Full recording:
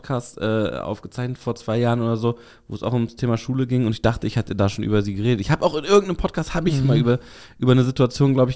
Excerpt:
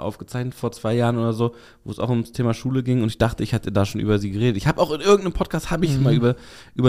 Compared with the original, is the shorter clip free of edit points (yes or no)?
yes